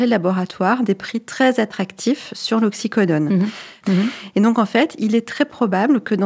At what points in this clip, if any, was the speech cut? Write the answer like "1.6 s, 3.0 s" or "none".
3.8 s

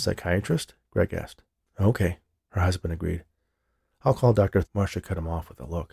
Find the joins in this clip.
1.6 s, 4.6 s

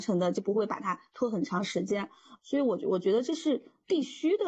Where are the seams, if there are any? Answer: 2.4 s

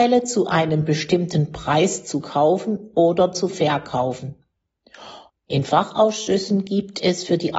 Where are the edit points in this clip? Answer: 5.3 s

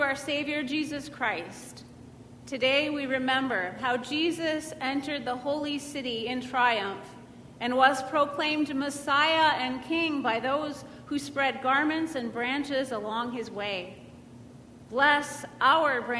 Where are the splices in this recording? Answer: none

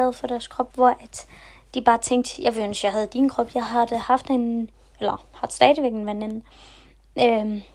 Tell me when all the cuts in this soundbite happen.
none

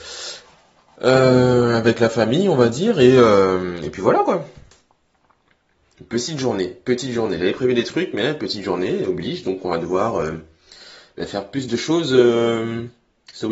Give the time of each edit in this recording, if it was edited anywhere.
none

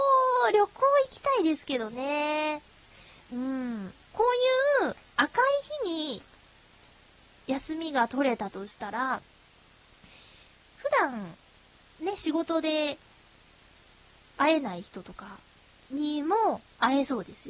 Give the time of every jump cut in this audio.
4.0 s

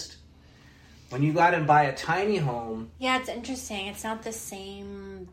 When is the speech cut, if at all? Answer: none

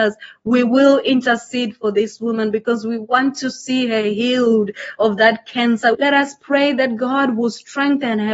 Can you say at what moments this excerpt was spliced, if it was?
5.9 s

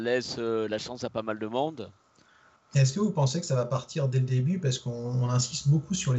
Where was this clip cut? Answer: 2.6 s

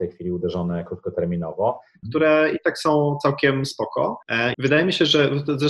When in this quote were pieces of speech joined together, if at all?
2.0 s, 4.5 s

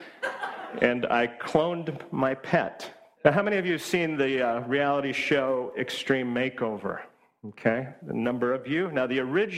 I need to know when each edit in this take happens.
3.2 s, 8.0 s

